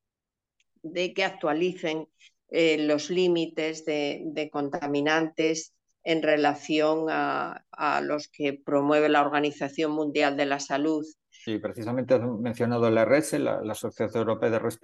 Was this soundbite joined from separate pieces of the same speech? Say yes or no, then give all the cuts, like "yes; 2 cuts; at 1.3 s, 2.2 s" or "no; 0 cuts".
yes; 1 cut; at 11.5 s